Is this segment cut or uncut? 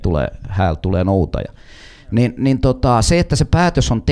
uncut